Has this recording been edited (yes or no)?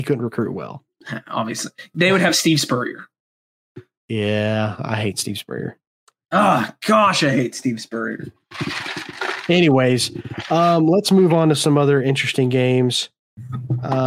no